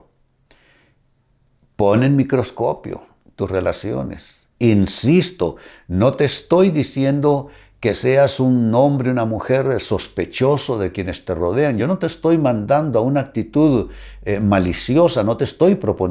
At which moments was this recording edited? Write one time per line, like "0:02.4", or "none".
none